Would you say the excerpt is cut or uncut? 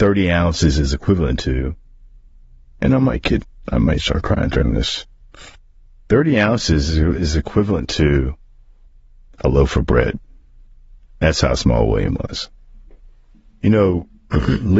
uncut